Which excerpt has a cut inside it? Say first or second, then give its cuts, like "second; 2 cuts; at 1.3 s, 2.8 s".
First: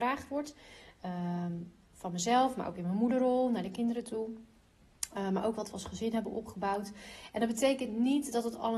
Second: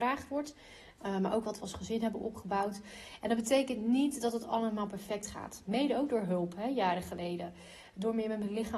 second; 2 cuts; at 1.0 s, 5.7 s